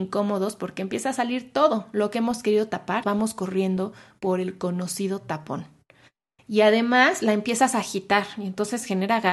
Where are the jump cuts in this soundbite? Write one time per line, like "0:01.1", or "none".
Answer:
0:03.0
0:06.4

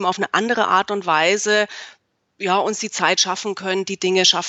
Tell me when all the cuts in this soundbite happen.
none

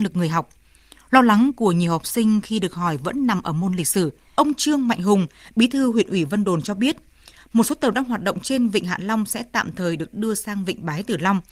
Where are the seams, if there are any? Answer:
0:04.3

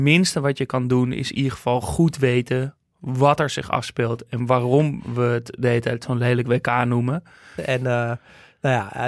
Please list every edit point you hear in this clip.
0:07.6

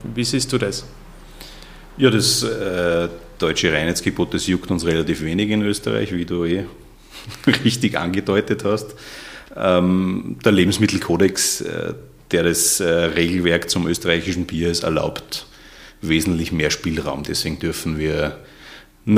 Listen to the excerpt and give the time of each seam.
none

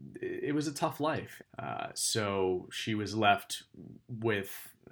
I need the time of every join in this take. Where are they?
0:01.4

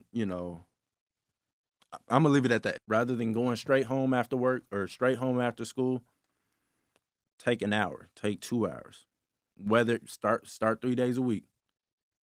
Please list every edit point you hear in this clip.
0:02.8

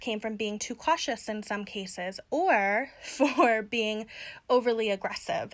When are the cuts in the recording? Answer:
none

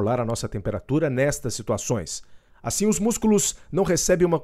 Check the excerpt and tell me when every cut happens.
0:02.5

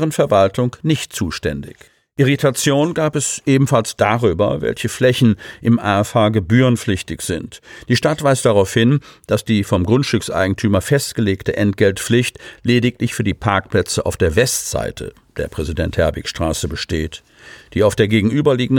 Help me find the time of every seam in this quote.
none

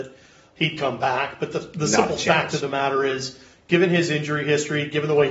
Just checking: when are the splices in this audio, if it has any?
none

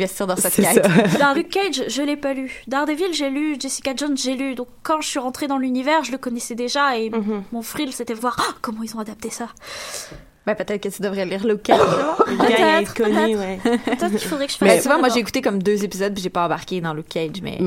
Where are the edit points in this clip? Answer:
0:01.3
0:08.2

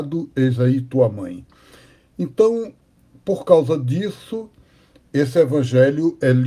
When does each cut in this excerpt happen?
none

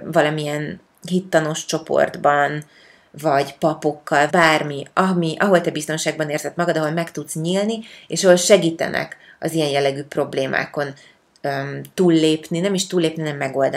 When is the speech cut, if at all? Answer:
0:04.3

